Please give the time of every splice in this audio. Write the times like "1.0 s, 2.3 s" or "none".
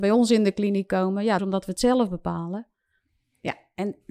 1.4 s